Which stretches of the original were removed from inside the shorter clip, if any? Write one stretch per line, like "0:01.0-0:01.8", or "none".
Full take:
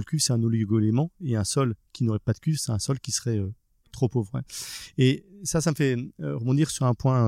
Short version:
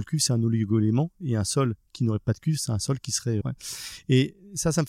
0:03.4-0:04.3

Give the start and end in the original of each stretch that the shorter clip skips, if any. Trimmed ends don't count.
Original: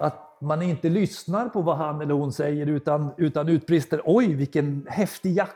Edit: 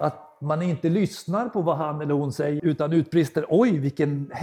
0:02.6-0:03.2

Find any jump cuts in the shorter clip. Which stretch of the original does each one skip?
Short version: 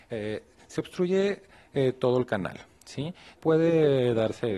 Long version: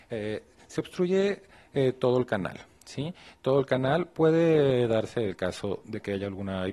0:03.3-0:04.1

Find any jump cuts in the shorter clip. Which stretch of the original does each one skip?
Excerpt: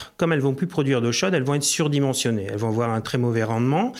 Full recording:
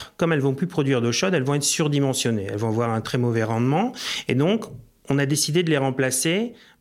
none

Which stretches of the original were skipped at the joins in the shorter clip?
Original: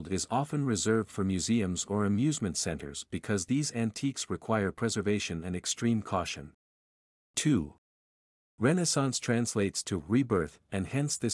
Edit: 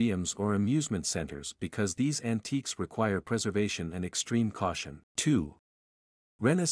0:06.6-0:07.2

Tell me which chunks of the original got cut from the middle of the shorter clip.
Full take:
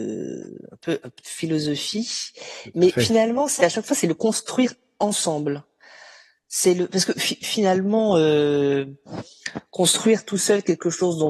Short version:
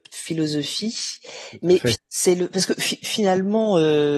0:03.1-0:06.3

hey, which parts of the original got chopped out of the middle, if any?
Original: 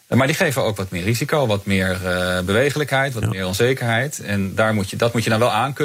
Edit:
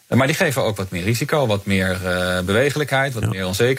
none

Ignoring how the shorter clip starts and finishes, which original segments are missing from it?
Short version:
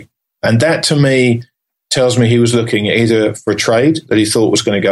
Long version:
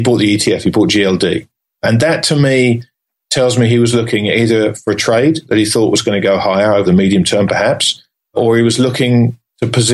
none

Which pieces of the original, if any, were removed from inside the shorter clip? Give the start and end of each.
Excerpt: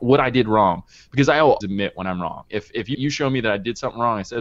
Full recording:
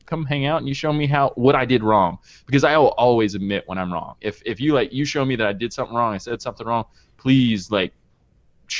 0:03.0-0:03.3
0:04.7-0:04.9

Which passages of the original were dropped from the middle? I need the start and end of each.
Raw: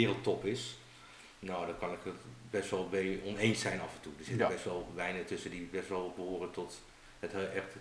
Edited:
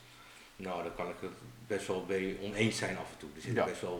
none

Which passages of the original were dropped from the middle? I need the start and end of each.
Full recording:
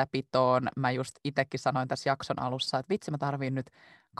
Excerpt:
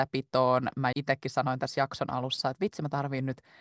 0:00.9-0:01.2

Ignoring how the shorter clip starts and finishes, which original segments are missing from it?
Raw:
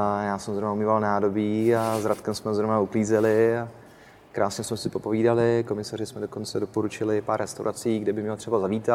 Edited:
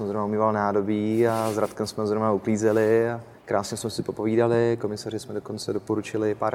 0:03.9-0:04.2

